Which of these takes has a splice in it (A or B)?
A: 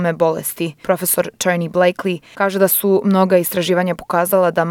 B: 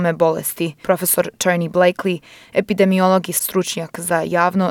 A